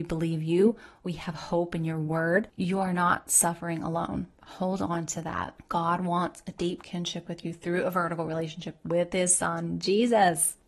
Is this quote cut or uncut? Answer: cut